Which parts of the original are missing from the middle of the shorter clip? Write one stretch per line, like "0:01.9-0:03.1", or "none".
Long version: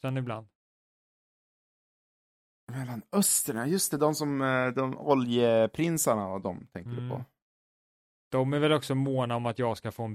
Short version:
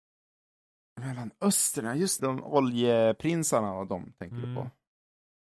0:03.9-0:04.7